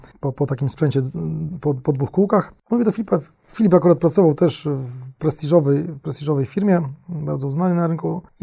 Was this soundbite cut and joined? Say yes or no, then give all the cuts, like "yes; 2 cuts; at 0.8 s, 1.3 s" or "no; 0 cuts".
yes; 1 cut; at 2.6 s